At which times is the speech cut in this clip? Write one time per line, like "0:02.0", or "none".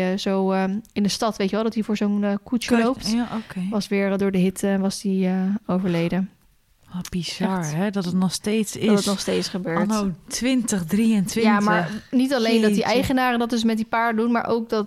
none